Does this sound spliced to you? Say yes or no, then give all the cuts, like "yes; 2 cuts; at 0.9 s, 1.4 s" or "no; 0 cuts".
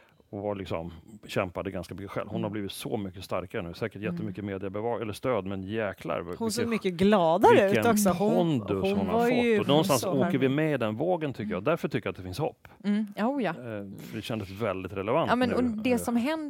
no; 0 cuts